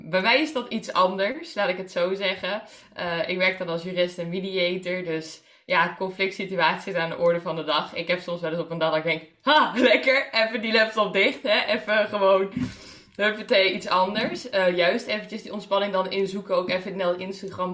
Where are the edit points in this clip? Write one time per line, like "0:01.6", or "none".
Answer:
none